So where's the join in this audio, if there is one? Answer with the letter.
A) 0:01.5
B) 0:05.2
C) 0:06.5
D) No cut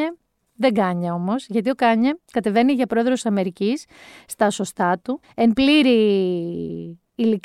B